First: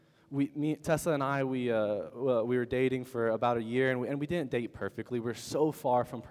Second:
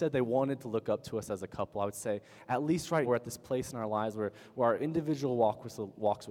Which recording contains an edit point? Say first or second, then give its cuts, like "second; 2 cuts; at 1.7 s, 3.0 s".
second; 1 cut; at 3.1 s